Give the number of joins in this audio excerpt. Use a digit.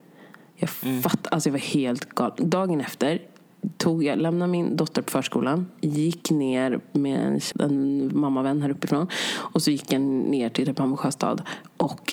1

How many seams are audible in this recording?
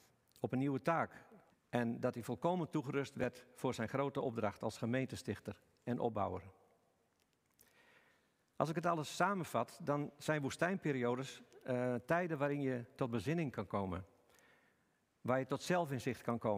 1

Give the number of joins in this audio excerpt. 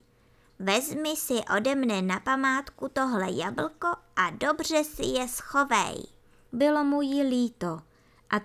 1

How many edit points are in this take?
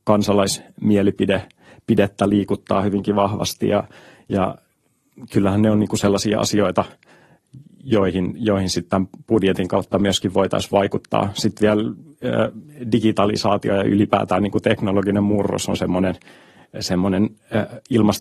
0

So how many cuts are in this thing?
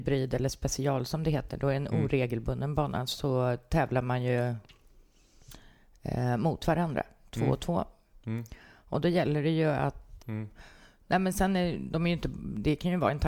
1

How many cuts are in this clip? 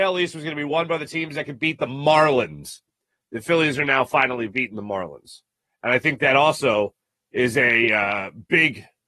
0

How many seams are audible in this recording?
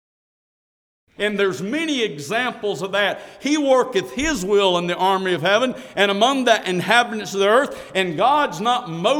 1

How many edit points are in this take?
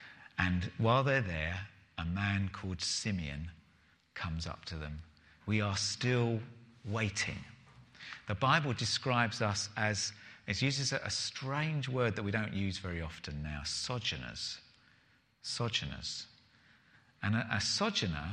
1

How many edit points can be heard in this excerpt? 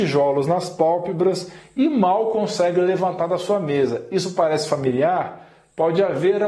0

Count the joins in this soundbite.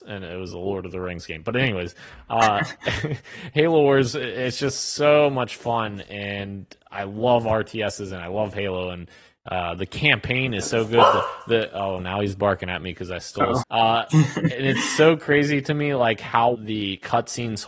2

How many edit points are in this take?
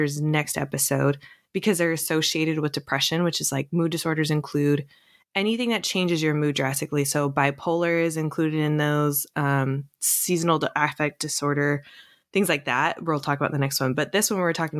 0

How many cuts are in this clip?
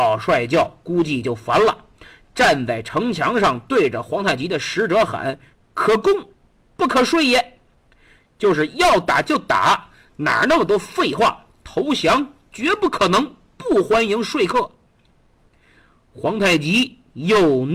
0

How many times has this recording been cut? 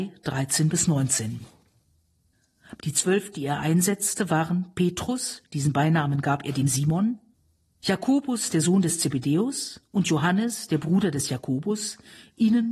1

